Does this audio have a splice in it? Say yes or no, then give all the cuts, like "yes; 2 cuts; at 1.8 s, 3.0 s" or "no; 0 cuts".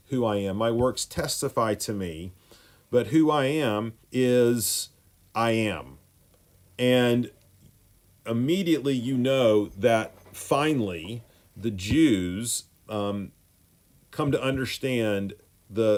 yes; 1 cut; at 4.0 s